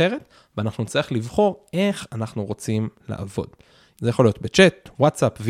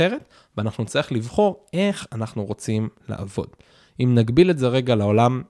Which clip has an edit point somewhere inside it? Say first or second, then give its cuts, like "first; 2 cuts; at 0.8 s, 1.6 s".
first; 1 cut; at 3.9 s